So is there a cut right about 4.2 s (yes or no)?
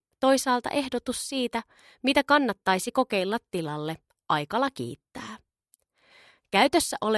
no